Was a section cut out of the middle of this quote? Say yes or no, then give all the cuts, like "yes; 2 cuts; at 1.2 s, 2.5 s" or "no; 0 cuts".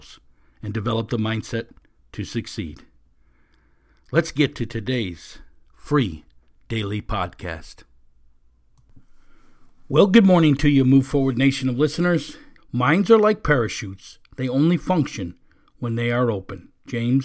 yes; 1 cut; at 12.6 s